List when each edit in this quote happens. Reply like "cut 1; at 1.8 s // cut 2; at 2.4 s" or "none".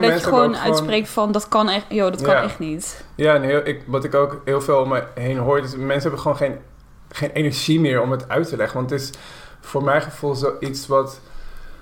none